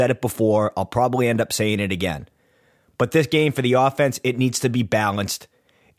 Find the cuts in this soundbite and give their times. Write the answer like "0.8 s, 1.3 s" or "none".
none